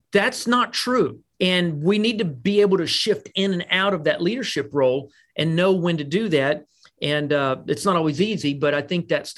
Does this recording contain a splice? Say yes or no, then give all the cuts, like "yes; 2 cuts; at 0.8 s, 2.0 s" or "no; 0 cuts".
yes; 1 cut; at 1.3 s